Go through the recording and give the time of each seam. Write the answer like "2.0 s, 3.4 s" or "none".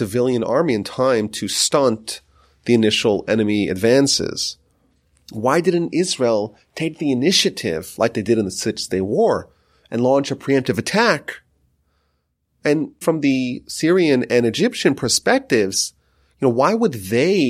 13.0 s